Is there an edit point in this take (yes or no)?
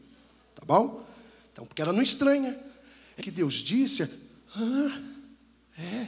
yes